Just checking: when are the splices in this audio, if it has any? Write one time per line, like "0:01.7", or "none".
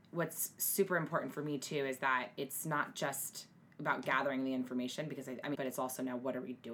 0:03.7
0:05.5